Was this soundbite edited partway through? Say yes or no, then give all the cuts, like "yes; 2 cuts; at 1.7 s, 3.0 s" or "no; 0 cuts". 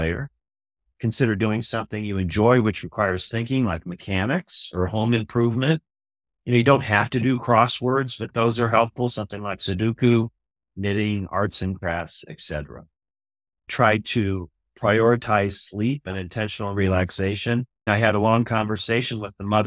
yes; 2 cuts; at 13.5 s, 17.9 s